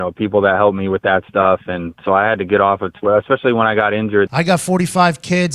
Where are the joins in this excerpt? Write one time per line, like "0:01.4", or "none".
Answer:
0:04.3